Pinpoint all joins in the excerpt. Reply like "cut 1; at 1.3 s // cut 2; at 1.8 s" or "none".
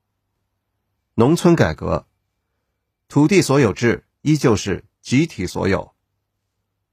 cut 1; at 0.9 s